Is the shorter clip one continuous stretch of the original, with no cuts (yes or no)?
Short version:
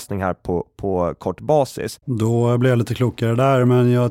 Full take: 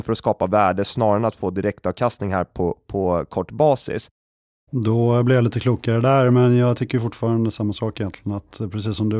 no